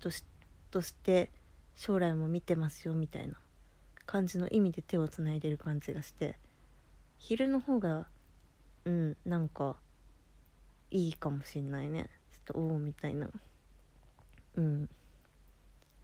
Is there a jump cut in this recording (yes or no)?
no